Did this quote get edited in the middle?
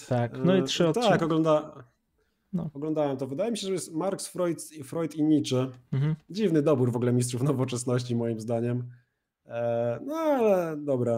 no; 0 cuts

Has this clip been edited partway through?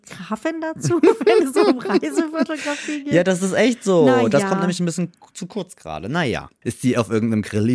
yes; 1 cut; at 6.6 s

